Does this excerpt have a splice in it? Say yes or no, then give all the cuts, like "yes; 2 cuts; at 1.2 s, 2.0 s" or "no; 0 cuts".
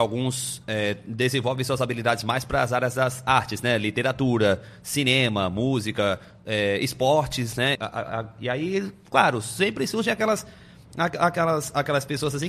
yes; 1 cut; at 7.8 s